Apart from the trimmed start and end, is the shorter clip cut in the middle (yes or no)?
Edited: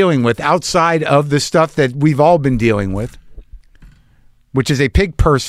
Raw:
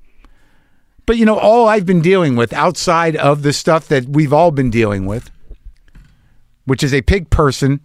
no